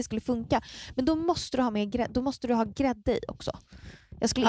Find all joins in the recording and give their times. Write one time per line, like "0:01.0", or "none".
none

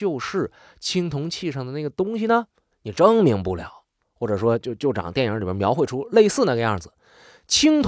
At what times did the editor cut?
0:02.7
0:04.0

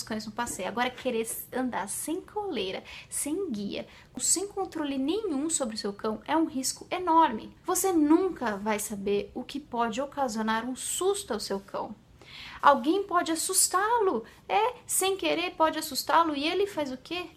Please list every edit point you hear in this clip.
0:07.6
0:12.6

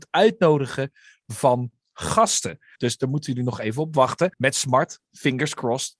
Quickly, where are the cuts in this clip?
0:02.8
0:04.3

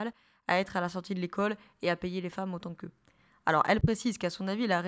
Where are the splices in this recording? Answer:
0:03.3

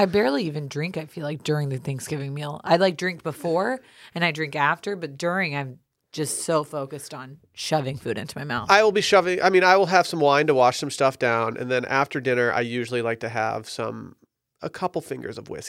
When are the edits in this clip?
none

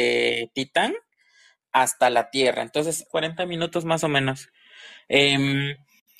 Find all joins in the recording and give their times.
0:03.1

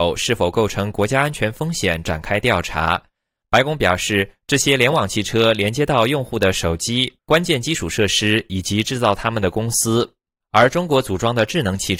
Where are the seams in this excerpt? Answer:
0:03.4
0:07.2

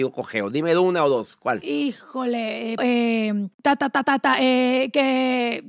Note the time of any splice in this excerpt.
0:02.8
0:04.0

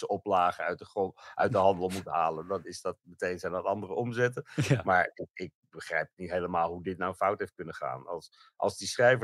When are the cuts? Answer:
none

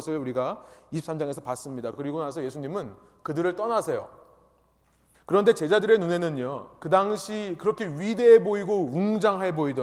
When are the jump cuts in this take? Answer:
none

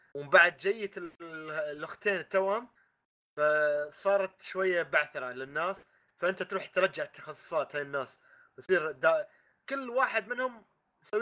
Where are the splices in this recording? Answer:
none

